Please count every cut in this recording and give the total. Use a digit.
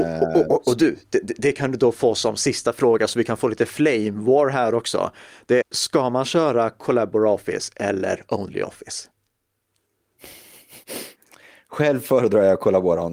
1